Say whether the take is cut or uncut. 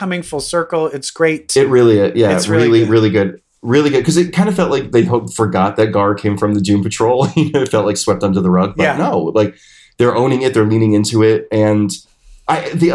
uncut